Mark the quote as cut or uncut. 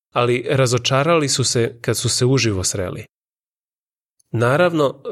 cut